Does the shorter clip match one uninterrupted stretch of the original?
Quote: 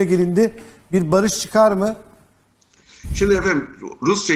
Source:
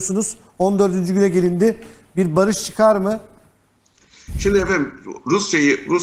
yes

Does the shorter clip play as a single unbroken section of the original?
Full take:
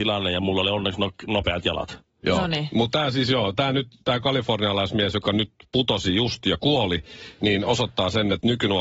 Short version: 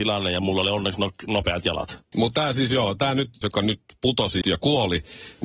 no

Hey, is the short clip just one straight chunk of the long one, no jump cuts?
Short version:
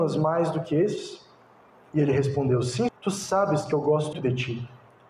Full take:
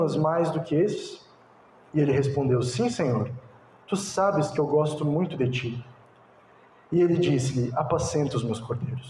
no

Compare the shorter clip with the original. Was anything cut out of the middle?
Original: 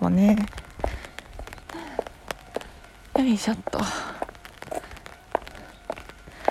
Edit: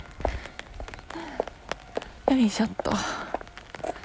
yes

